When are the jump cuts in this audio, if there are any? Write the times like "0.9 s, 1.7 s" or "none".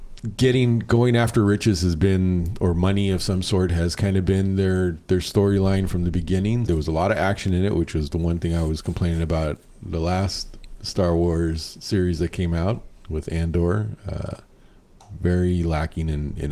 6.7 s